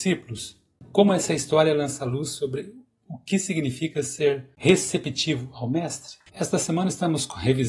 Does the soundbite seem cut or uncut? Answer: cut